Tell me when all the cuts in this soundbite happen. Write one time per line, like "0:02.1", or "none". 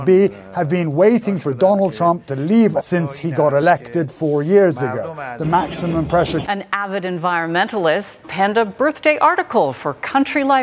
0:02.8
0:06.5
0:08.2